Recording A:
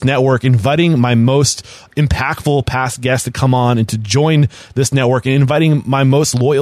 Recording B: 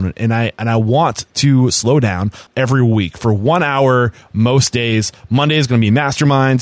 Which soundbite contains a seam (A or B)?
B